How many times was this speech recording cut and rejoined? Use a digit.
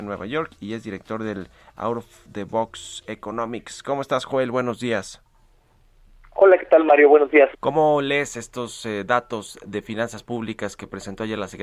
1